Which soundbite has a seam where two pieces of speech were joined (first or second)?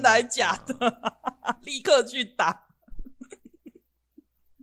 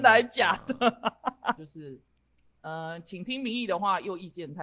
second